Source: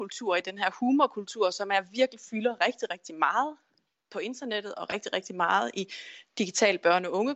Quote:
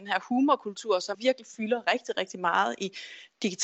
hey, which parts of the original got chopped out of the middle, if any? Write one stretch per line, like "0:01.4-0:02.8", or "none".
0:01.6-0:01.9
0:02.9-0:05.1